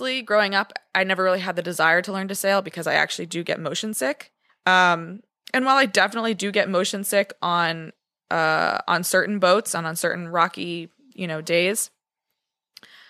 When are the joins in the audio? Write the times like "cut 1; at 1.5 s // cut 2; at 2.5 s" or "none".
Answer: cut 1; at 4.5 s